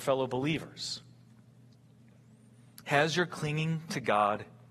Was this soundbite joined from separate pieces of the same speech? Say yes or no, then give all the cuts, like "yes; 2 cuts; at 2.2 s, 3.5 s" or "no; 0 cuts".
no; 0 cuts